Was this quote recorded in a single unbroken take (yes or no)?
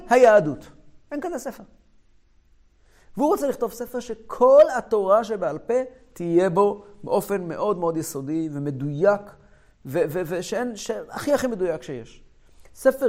yes